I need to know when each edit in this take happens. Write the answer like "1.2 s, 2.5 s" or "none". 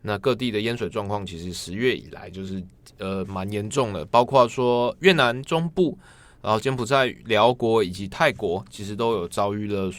none